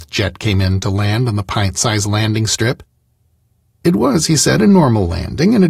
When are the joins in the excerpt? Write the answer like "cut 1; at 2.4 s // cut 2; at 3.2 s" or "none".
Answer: none